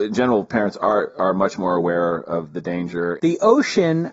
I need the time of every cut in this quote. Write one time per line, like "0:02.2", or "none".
0:03.2